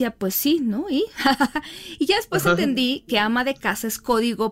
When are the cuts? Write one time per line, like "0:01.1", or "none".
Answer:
none